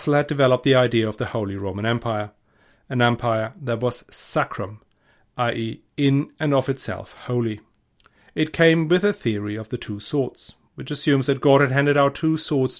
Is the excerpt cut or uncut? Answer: uncut